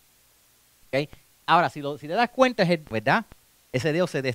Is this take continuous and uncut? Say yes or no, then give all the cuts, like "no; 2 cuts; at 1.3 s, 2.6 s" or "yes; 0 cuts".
no; 1 cut; at 2.9 s